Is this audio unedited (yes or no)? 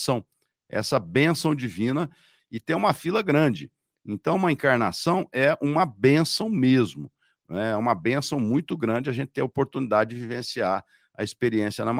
no